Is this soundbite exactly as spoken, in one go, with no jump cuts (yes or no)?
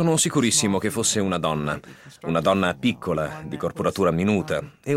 yes